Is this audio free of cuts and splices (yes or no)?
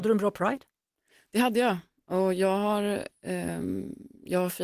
yes